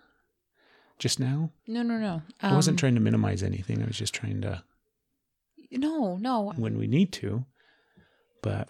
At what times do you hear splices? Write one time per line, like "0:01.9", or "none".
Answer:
0:01.6
0:06.5